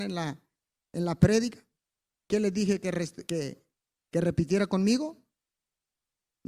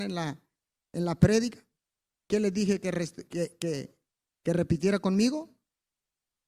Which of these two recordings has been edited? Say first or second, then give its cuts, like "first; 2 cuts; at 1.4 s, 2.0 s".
first; 1 cut; at 3.3 s